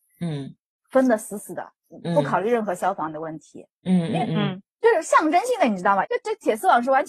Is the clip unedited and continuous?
no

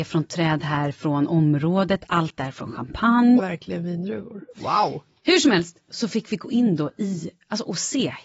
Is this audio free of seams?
no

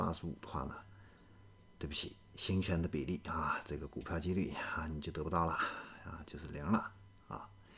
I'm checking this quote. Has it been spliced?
no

